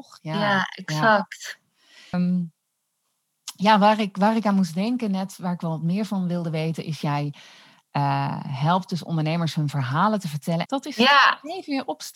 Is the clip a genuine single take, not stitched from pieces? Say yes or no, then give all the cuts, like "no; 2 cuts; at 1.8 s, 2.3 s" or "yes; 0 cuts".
no; 2 cuts; at 2.1 s, 10.7 s